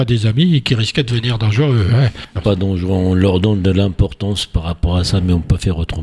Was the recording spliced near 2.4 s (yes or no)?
yes